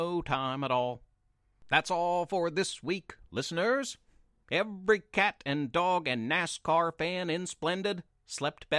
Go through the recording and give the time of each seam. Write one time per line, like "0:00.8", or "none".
0:04.4